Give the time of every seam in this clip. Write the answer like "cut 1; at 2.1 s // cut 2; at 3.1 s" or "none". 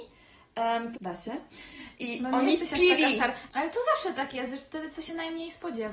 cut 1; at 0.9 s // cut 2; at 3.5 s